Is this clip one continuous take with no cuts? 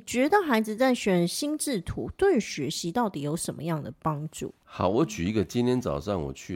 yes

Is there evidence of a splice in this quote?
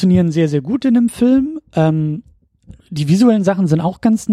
no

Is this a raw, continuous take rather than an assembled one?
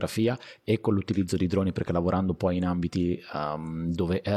yes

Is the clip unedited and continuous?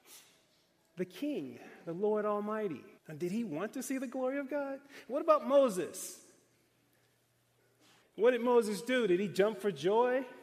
no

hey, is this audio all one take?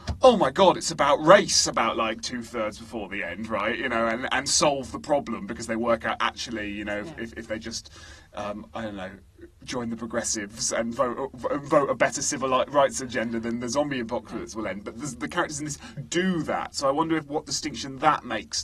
no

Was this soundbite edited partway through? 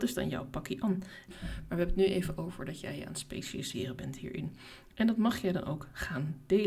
yes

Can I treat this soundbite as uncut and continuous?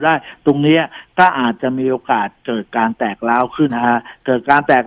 no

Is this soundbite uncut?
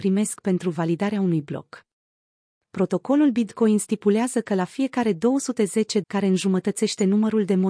no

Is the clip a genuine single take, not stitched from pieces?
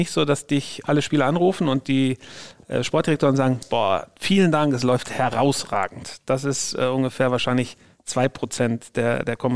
yes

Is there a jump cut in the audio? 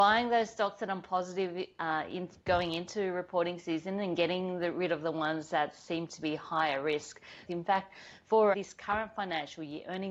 yes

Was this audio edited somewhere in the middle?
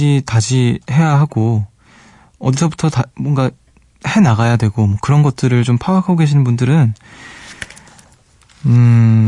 no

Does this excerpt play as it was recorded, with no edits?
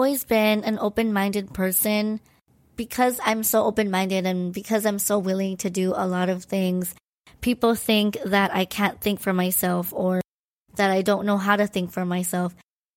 yes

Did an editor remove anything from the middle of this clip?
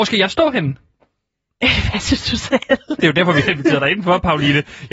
yes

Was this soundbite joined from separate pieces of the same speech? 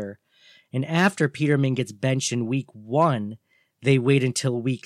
no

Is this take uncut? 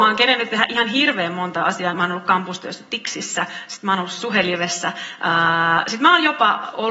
no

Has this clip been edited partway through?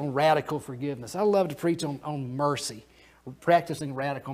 no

